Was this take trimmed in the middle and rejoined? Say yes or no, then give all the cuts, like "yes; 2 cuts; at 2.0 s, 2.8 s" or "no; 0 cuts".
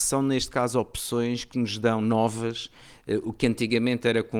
no; 0 cuts